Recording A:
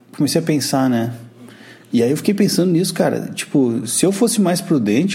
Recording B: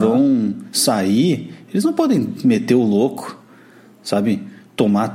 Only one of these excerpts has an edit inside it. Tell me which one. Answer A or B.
A